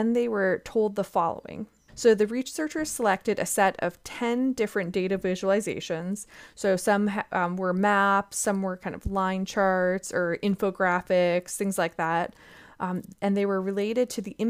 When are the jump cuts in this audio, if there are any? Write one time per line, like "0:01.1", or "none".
0:01.9

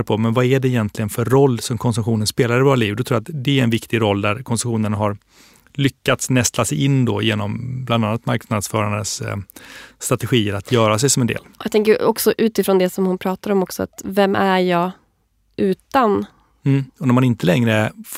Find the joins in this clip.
0:16.9

